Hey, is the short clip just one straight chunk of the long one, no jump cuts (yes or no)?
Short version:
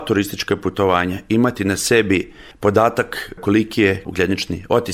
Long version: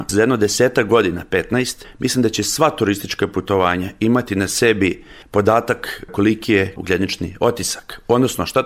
yes